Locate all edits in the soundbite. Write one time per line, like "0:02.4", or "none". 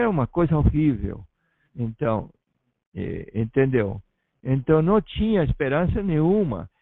0:01.7